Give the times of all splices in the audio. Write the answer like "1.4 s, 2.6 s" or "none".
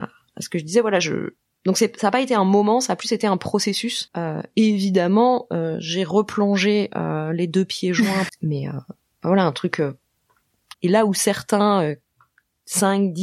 4.1 s, 8.3 s, 10.7 s